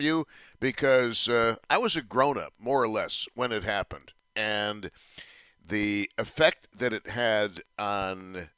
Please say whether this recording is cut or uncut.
uncut